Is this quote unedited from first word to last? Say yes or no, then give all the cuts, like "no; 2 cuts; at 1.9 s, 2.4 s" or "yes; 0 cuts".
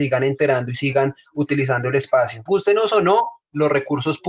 no; 1 cut; at 2.5 s